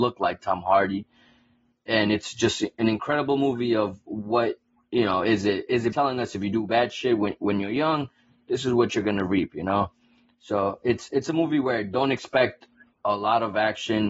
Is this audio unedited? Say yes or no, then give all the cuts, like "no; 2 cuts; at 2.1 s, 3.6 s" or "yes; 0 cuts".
no; 1 cut; at 5.9 s